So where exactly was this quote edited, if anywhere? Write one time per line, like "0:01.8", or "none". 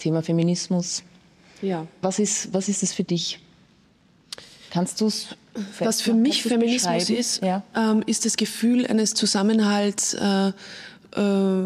none